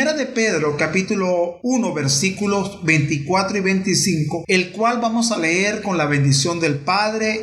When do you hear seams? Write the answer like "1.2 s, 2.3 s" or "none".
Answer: none